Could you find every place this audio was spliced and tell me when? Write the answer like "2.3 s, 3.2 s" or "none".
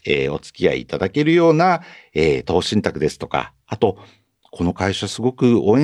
none